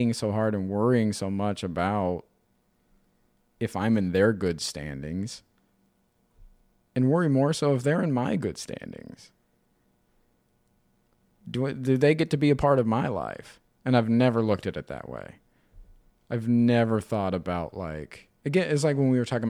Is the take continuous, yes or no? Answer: yes